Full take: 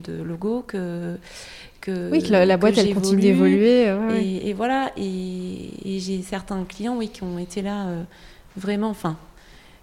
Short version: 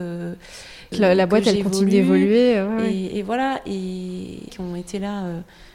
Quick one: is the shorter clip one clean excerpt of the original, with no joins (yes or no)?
no